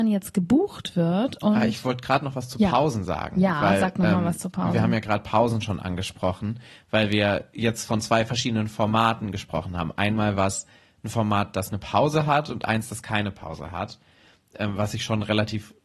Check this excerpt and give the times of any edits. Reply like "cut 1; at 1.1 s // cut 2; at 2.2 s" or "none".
none

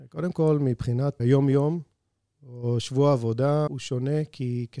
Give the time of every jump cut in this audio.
cut 1; at 1.2 s // cut 2; at 3.7 s

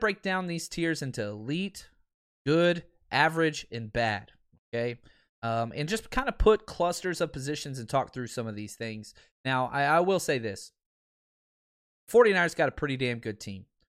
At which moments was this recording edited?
none

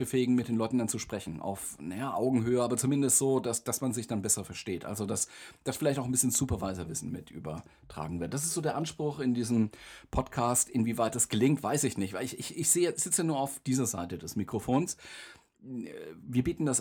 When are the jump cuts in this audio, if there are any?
none

